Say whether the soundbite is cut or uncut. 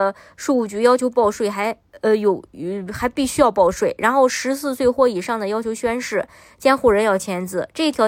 uncut